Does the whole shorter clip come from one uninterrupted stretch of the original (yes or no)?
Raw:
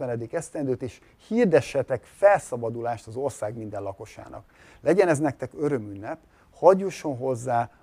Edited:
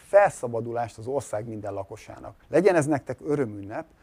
no